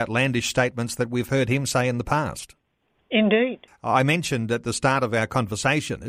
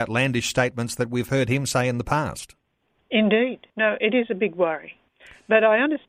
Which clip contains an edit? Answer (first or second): first